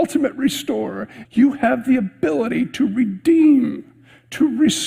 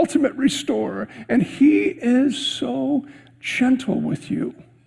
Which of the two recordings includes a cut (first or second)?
first